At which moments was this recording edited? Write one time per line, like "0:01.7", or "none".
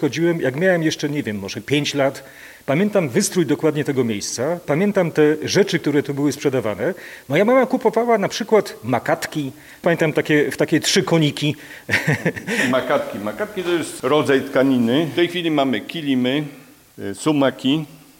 none